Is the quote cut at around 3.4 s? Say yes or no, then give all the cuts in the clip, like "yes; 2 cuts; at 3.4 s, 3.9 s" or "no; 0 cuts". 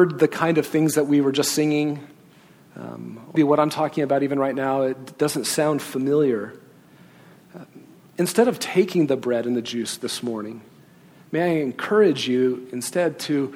yes; 1 cut; at 3.4 s